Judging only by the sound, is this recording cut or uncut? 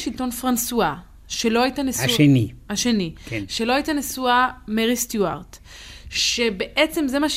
uncut